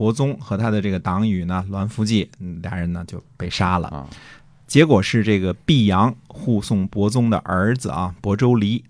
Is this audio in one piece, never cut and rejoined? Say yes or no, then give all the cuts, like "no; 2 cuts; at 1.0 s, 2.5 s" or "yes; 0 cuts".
yes; 0 cuts